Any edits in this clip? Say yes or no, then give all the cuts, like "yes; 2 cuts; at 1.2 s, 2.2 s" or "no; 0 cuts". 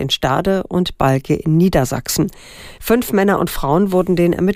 yes; 1 cut; at 2.8 s